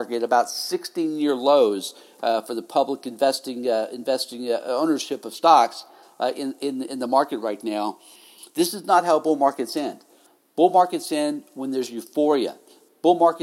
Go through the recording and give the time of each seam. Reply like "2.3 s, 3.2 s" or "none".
none